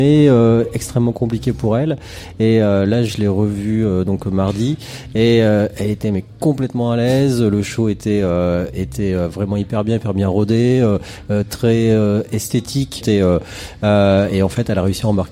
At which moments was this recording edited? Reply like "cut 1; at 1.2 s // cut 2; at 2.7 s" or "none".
cut 1; at 13.0 s